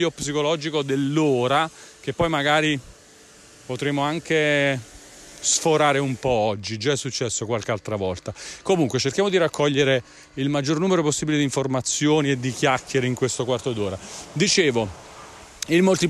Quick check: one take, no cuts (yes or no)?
yes